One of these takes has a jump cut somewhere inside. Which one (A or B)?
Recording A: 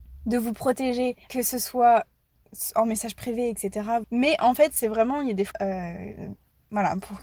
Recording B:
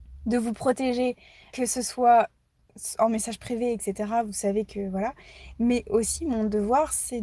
A